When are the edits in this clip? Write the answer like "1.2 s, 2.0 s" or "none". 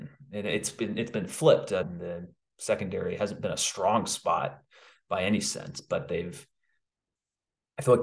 1.8 s

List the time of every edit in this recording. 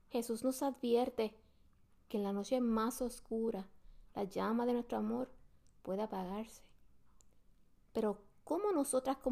none

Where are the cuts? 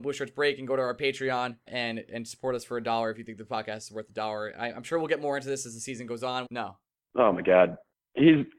1.7 s, 6.5 s

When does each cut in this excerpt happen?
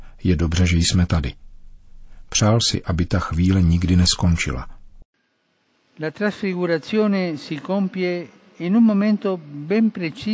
none

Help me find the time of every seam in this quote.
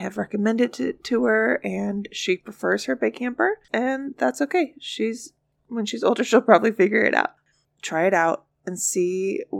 3.7 s, 7.6 s

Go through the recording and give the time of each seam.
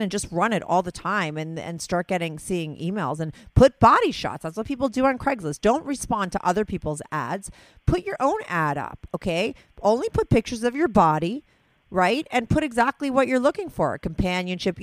none

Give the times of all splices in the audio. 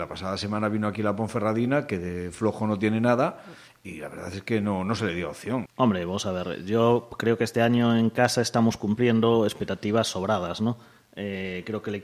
5.7 s

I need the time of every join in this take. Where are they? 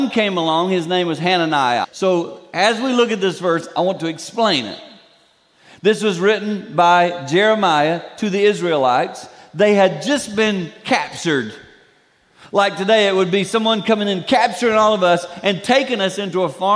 1.8 s

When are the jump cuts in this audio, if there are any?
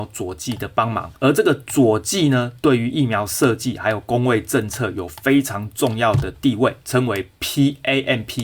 1.1 s, 6.8 s

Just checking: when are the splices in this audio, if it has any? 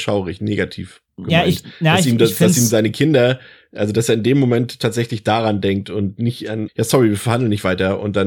6.7 s

